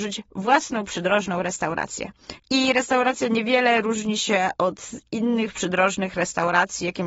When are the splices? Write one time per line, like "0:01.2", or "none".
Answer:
0:02.4